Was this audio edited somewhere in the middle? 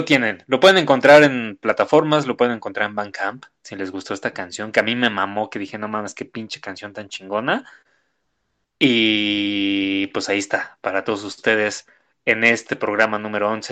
no; 0 cuts

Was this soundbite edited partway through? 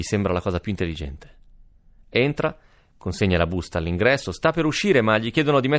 no; 0 cuts

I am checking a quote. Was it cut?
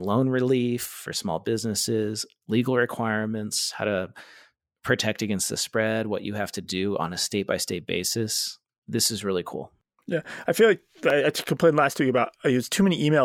no; 0 cuts

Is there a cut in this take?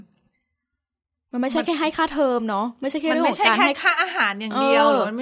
no; 0 cuts

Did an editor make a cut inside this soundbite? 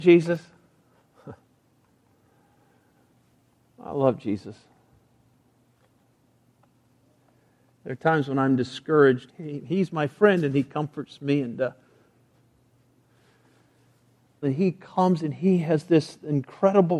yes; 2 cuts; at 9.3 s, 14.4 s

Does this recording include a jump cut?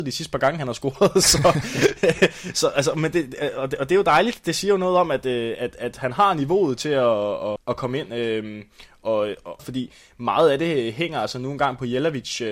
yes; 2 cuts; at 7.6 s, 9.6 s

